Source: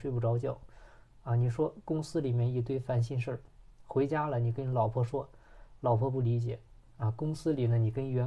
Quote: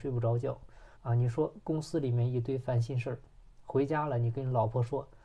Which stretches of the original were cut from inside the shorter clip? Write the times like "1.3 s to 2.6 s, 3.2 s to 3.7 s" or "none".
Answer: 1.0 s to 1.2 s